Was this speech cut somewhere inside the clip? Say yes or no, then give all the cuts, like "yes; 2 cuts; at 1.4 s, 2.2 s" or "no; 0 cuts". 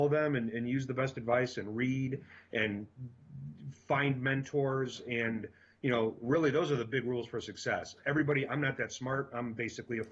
no; 0 cuts